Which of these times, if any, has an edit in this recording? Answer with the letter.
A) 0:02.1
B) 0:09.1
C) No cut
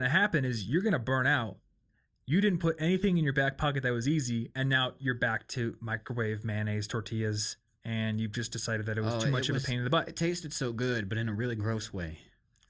C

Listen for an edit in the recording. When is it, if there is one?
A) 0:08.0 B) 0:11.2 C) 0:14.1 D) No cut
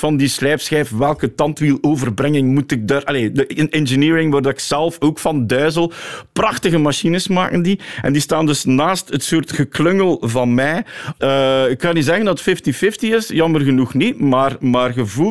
B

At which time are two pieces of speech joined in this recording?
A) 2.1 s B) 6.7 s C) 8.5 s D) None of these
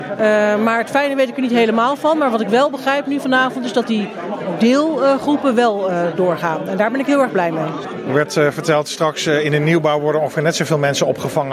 D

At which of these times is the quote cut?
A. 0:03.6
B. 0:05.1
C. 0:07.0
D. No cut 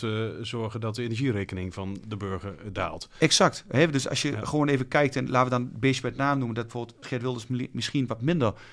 C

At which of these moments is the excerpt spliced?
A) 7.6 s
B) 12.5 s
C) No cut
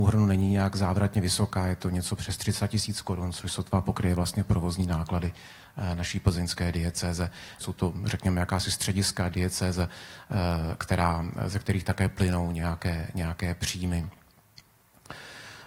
A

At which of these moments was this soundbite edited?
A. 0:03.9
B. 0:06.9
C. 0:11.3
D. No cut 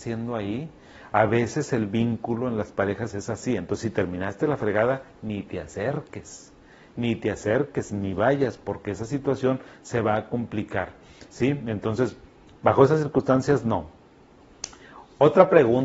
D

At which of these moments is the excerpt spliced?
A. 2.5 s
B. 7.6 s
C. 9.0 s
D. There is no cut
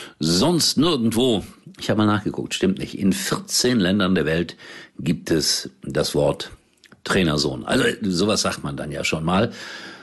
D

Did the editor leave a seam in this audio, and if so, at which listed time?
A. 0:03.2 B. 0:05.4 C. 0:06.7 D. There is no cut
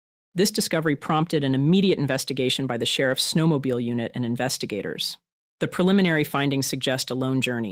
D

